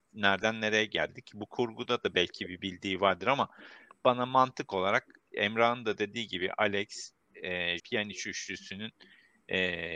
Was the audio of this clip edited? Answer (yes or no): yes